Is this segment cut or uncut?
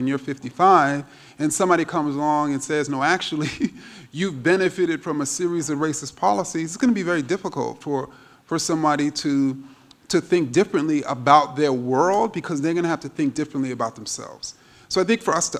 uncut